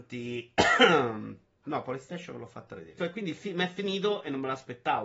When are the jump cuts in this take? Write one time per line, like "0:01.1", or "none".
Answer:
0:01.6
0:03.0